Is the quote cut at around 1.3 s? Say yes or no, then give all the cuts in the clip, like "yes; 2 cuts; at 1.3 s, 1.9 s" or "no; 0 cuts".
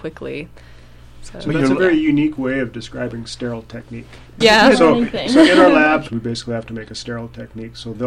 no; 2 cuts; at 4.4 s, 6.1 s